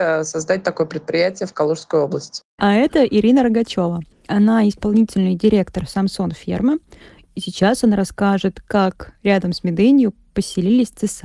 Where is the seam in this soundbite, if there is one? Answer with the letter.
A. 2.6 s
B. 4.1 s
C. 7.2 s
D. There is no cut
A